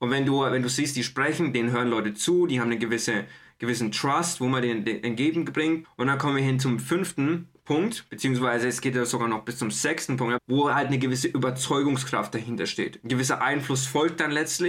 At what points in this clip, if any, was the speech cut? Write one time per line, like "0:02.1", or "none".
0:05.8
0:10.4